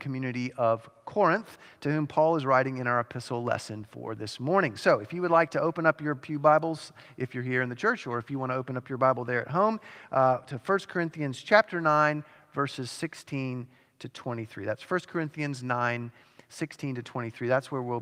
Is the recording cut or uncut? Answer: uncut